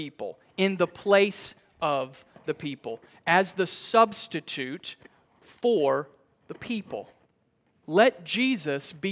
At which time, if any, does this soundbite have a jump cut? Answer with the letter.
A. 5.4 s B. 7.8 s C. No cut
B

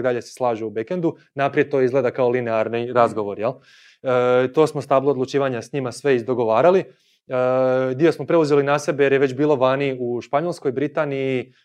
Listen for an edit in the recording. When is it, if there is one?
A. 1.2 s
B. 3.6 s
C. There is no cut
C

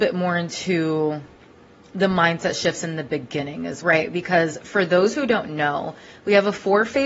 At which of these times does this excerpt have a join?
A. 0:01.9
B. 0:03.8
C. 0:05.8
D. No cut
B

